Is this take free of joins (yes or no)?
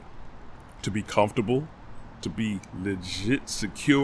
no